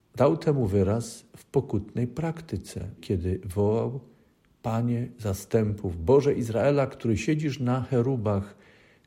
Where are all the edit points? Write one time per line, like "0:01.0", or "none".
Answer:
0:03.0

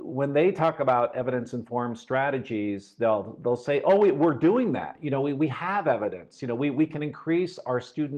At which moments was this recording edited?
none

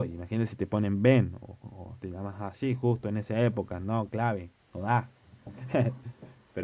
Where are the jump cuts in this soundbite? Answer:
0:04.6

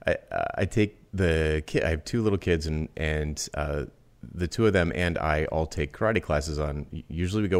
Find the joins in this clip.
0:01.1

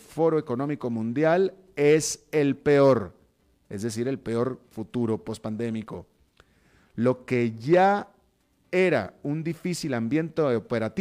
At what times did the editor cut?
none

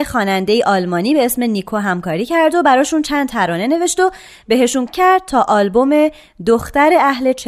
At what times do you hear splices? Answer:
0:04.9

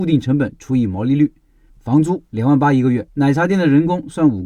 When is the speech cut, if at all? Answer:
0:01.7
0:03.1

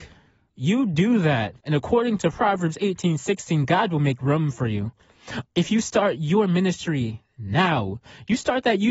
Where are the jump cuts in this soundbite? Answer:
0:01.6
0:05.4

